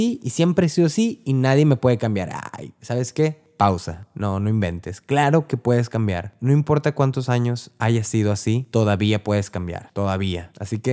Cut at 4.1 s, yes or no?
no